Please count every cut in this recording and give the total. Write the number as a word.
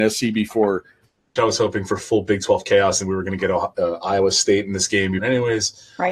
two